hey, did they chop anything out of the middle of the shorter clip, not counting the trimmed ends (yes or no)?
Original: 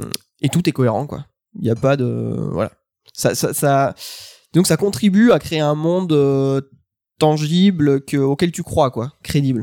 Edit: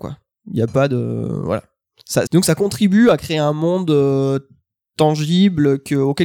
yes